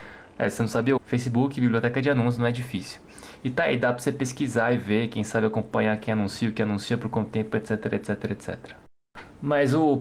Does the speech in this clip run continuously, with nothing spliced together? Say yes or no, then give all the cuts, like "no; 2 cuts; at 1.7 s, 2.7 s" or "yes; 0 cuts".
no; 1 cut; at 1.0 s